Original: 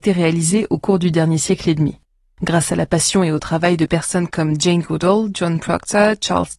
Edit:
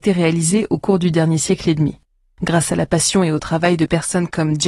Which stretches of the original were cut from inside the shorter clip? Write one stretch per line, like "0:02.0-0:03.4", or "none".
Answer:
none

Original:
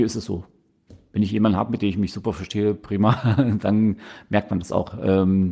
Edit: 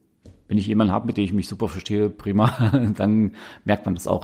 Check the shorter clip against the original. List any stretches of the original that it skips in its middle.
none

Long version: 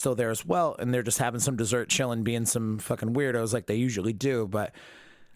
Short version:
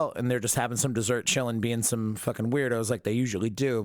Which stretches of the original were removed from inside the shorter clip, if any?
none

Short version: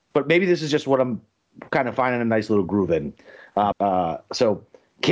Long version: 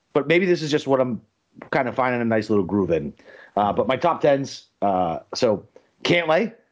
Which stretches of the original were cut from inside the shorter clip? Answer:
0:03.7-0:04.7

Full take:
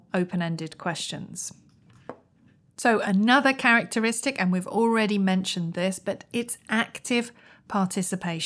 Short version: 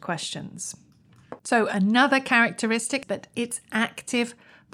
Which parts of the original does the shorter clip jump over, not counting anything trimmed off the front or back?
0:02.2-0:02.7
0:04.4-0:06.0

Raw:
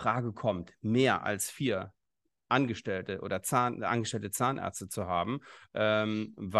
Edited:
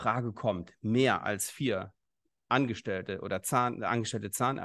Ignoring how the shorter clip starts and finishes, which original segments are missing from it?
none

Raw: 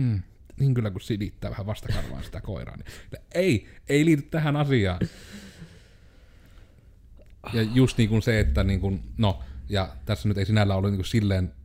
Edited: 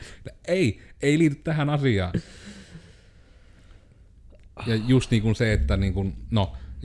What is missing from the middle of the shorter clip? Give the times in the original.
none

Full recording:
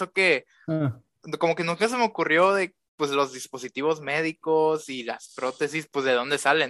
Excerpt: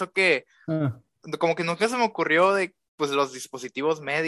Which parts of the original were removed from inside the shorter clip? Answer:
none

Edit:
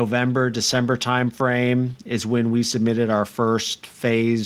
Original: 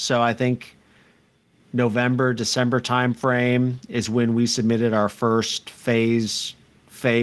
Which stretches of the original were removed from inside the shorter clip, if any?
none

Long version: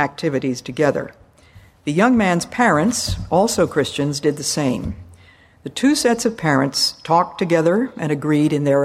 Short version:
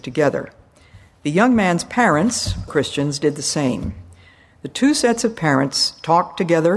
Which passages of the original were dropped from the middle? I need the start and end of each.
0:03.3-0:03.7

